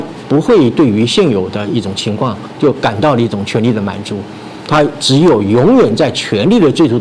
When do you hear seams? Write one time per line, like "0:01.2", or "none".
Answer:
none